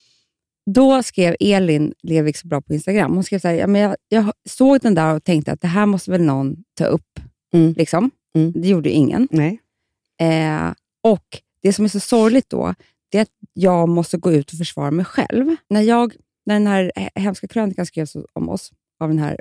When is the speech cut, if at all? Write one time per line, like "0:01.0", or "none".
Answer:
0:15.7